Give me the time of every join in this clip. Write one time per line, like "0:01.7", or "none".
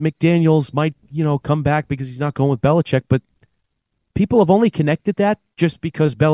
none